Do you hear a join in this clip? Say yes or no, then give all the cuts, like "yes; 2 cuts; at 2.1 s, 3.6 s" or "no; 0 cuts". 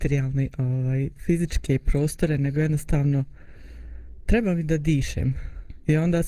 no; 0 cuts